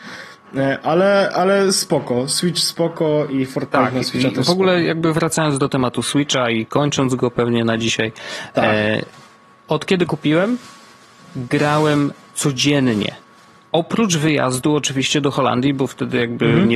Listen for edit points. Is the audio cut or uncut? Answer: uncut